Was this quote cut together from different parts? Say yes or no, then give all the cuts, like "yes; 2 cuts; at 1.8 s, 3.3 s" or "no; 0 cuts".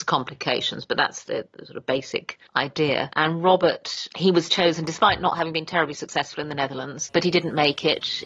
yes; 2 cuts; at 2.5 s, 7.1 s